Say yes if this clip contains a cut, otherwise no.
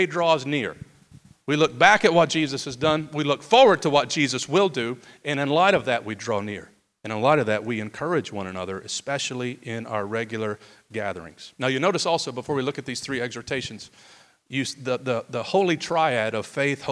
yes